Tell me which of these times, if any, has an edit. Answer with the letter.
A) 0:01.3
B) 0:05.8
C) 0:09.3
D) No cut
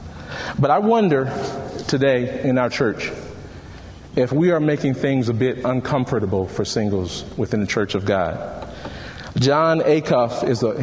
D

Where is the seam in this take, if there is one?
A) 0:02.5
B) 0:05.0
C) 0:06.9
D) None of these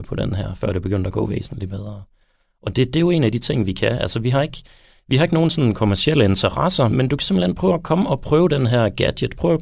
C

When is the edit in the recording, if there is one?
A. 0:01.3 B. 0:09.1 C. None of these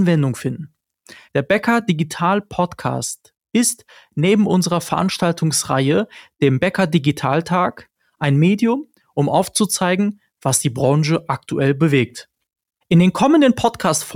A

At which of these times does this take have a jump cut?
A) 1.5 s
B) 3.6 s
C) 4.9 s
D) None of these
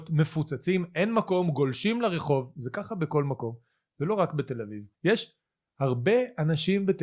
C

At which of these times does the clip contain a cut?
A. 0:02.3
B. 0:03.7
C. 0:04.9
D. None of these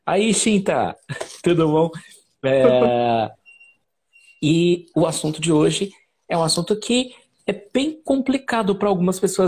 C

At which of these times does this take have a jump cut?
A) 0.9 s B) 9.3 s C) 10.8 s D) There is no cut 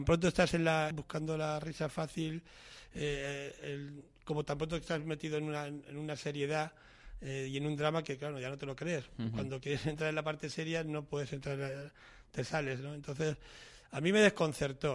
A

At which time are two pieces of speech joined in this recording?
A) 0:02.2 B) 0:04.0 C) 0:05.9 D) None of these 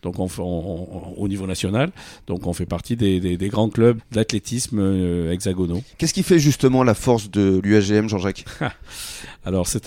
B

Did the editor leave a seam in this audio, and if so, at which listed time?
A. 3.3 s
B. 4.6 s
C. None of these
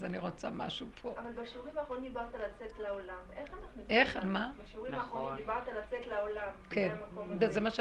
C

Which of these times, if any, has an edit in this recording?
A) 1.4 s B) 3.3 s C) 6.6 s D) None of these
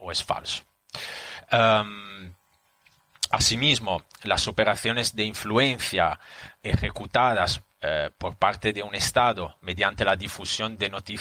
C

